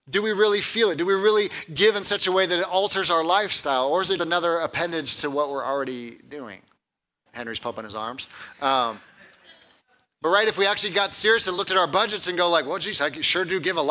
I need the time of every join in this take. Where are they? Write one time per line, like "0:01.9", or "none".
0:04.2
0:07.3